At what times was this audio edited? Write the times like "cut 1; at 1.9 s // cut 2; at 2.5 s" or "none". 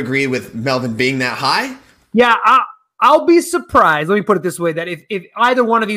cut 1; at 2.0 s